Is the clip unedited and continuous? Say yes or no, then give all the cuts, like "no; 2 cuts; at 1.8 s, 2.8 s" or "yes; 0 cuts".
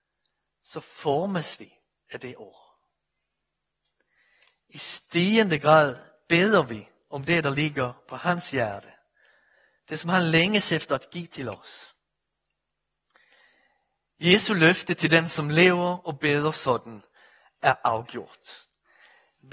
yes; 0 cuts